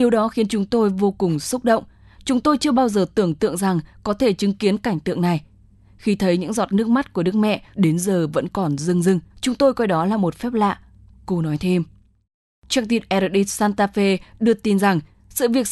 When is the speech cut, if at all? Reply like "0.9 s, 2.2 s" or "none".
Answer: 7.7 s, 9.3 s, 12.5 s

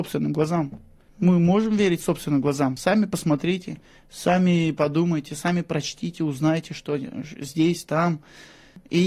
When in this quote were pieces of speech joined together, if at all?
none

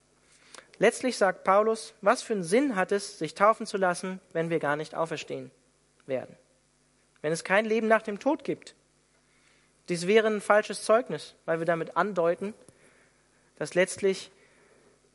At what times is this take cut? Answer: none

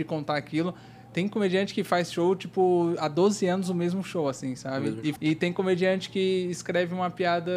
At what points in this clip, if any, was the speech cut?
5.1 s

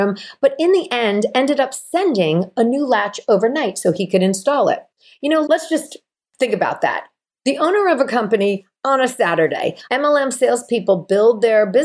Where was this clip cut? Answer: 5.4 s, 9.9 s

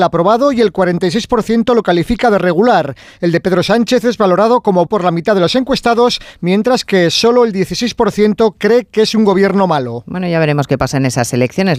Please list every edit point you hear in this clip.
4.9 s

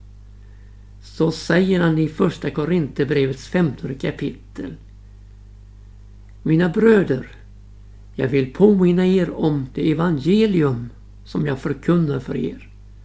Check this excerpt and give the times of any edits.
none

